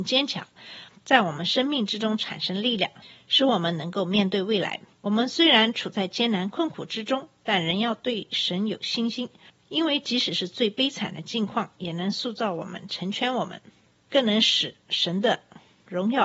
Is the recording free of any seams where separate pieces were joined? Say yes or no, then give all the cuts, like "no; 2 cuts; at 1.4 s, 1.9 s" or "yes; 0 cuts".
no; 1 cut; at 4.9 s